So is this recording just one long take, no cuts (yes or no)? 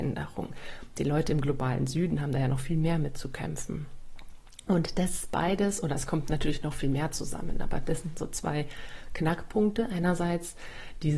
yes